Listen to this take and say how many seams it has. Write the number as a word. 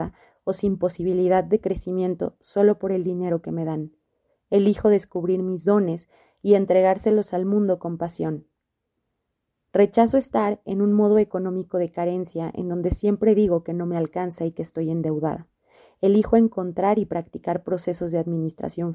zero